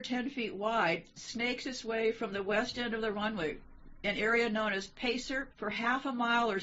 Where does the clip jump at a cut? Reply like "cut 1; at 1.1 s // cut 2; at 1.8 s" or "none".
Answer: cut 1; at 5.5 s

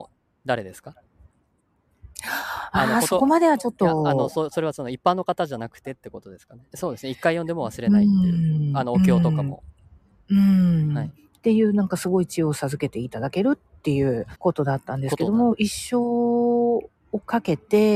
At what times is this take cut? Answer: cut 1; at 6.7 s // cut 2; at 14.3 s // cut 3; at 15.5 s

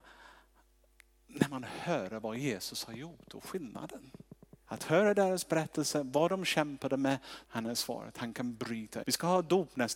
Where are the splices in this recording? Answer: cut 1; at 4.6 s // cut 2; at 7.4 s // cut 3; at 9.0 s

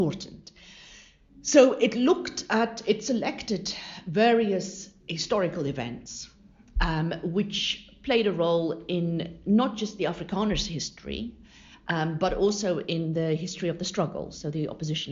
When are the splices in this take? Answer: none

